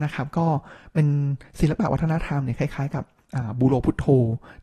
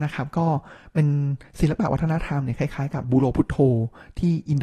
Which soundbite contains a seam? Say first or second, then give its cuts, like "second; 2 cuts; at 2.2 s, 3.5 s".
second; 1 cut; at 3.0 s